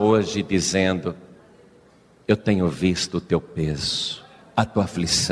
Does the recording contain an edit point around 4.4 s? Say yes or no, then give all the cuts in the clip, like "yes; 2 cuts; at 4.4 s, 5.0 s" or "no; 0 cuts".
yes; 1 cut; at 4.4 s